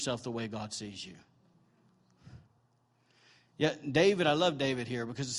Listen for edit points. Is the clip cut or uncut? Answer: uncut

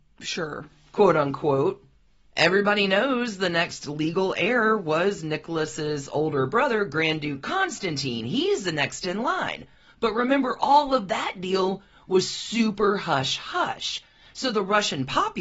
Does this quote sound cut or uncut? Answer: uncut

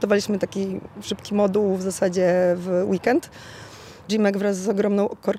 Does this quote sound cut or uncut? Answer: cut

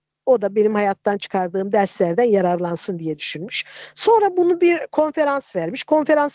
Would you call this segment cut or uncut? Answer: uncut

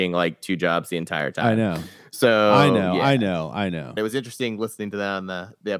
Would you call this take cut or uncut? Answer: cut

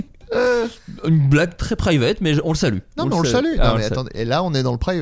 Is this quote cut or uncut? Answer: uncut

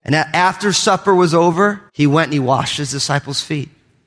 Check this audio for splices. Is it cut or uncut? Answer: cut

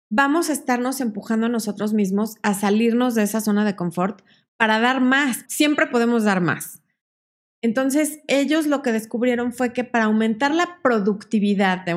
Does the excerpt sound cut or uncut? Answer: cut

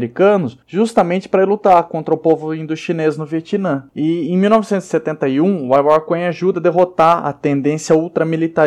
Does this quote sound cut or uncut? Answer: cut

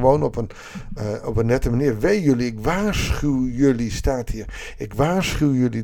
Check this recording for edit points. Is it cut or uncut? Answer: uncut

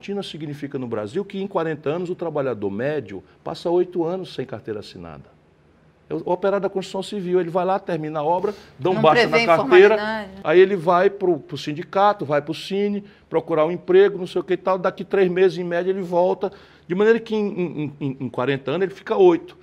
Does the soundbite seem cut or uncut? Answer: uncut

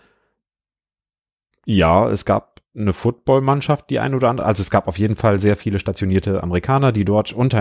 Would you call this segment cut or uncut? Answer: uncut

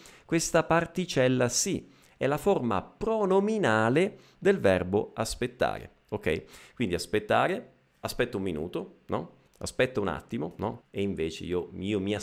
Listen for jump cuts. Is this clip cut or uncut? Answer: cut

